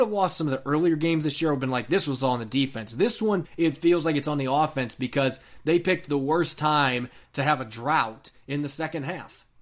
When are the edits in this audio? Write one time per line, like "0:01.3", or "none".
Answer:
0:03.4